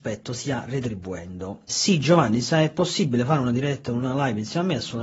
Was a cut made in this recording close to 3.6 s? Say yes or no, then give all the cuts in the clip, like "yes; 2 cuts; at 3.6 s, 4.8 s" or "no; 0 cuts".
no; 1 cut; at 1.7 s